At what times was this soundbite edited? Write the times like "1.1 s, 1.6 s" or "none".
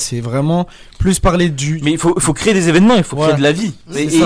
none